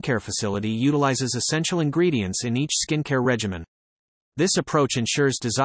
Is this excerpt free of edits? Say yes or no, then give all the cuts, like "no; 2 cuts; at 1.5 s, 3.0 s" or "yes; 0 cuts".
yes; 0 cuts